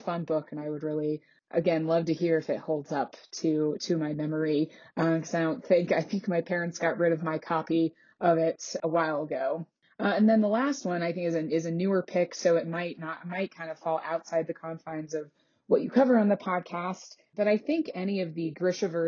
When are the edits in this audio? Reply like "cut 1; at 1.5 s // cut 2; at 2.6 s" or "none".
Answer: cut 1; at 8.8 s